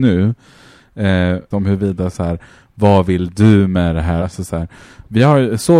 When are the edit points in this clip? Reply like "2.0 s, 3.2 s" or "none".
1.5 s, 4.2 s